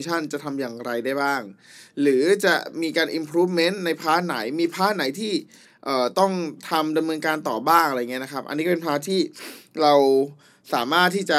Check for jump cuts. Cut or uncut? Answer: uncut